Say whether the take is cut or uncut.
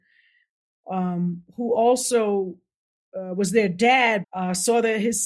cut